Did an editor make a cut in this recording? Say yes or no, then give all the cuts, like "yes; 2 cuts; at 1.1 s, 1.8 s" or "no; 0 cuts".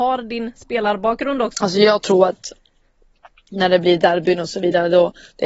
yes; 1 cut; at 1.5 s